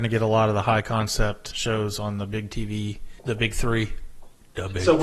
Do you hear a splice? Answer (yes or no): yes